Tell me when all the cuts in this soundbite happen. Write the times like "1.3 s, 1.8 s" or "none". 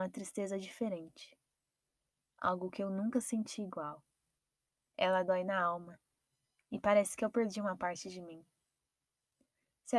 none

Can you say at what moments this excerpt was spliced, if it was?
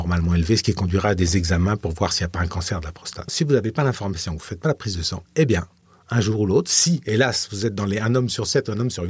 3.3 s

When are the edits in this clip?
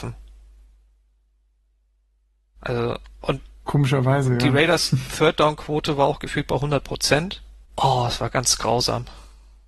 7.6 s

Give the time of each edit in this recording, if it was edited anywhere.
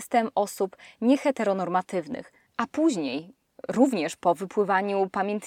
2.5 s

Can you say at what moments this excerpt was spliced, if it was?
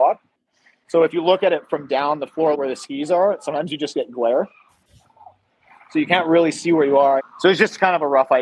2.5 s, 7.2 s

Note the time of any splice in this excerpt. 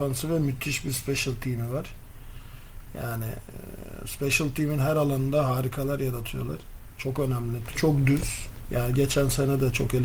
7.7 s

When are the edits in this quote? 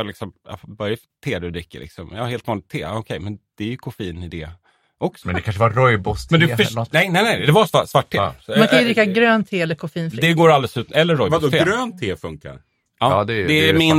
5.2 s

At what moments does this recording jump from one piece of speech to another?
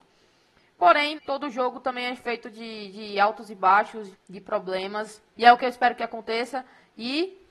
1.2 s, 4.1 s, 5.3 s

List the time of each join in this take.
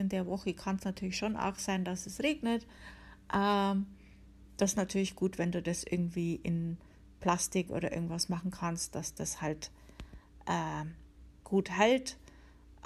11.4 s

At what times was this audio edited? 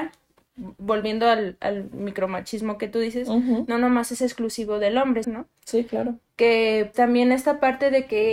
5.2 s, 6.9 s

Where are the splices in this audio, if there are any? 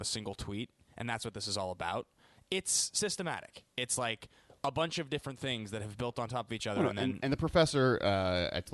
none

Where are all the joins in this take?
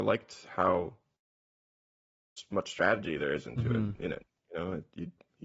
none

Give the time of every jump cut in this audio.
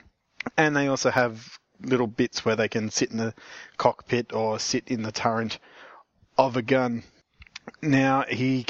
none

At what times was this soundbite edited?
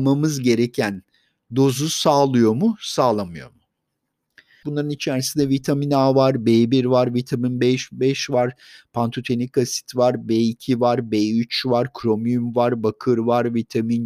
4.6 s

